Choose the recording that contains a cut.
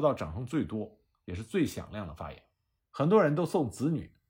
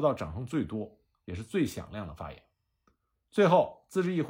first; 1 cut; at 2.8 s

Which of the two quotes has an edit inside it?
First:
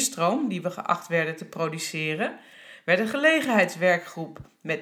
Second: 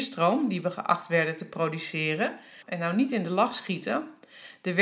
second; 1 cut; at 2.6 s

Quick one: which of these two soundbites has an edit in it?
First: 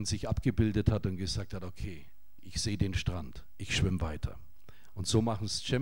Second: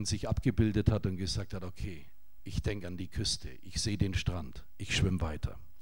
first; 1 cut; at 2.4 s

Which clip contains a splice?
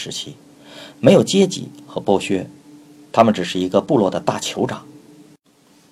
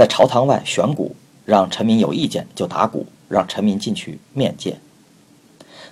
second; 1 cut; at 3.3 s

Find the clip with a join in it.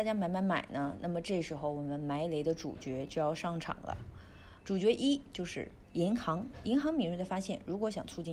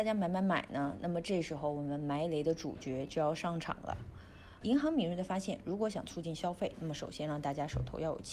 second; 1 cut; at 4.6 s

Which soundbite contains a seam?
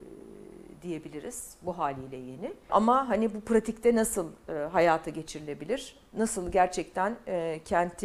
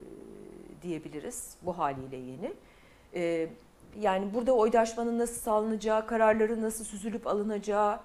first; 1 cut; at 2.7 s

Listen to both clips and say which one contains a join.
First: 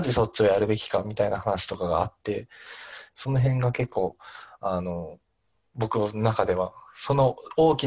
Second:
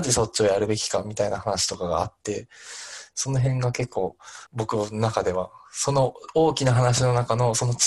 second; 1 cut; at 4.5 s

